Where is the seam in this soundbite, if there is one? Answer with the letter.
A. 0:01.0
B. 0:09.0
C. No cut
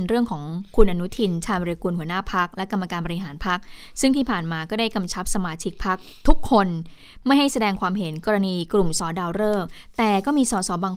B